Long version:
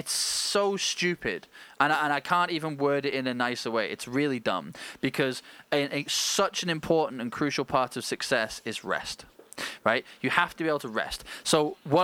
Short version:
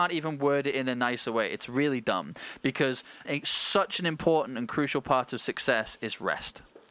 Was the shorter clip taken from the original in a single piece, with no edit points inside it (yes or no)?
no